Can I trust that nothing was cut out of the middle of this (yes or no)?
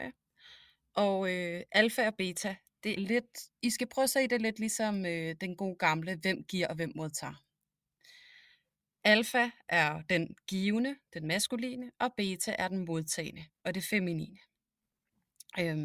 no